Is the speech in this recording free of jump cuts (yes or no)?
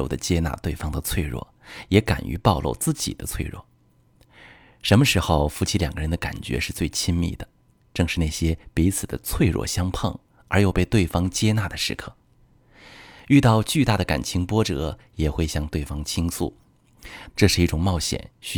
no